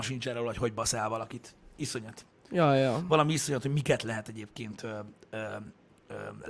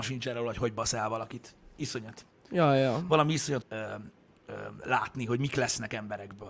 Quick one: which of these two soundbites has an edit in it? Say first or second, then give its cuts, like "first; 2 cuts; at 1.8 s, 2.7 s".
second; 1 cut; at 3.6 s